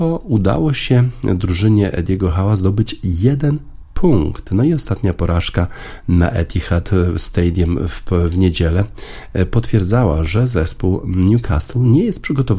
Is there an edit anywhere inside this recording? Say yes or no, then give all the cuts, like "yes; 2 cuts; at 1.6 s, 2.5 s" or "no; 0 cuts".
no; 0 cuts